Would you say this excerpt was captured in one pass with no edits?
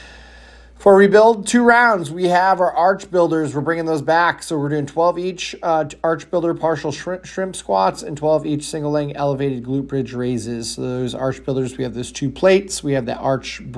yes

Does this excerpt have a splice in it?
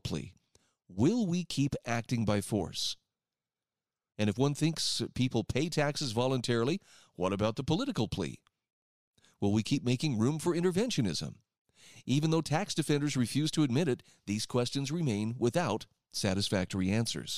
no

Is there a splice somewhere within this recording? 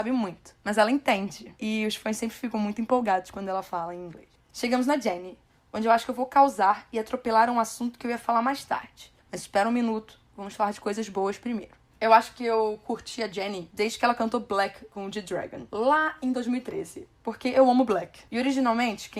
no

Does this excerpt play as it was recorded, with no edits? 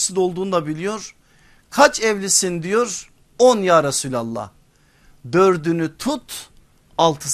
yes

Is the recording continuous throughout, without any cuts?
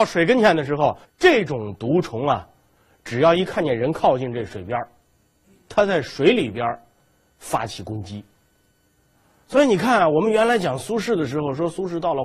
no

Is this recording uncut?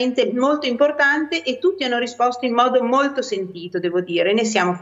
yes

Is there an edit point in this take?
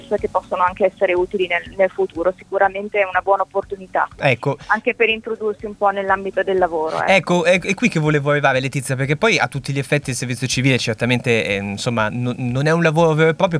no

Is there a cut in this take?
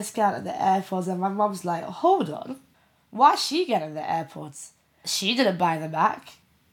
no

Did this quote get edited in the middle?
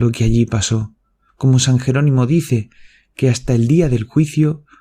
yes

